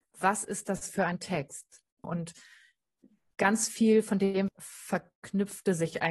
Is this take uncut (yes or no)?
no